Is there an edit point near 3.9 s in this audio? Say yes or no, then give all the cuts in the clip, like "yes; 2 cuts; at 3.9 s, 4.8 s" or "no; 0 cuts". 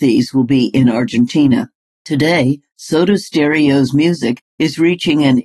no; 1 cut; at 1.9 s